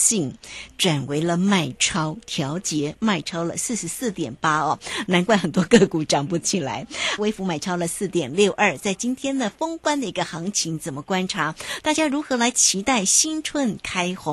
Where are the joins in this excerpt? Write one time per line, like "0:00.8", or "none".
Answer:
0:07.2